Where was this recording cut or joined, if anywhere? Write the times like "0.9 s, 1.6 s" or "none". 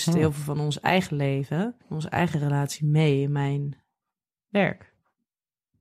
1.8 s